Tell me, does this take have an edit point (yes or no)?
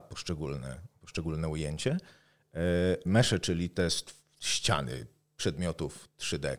yes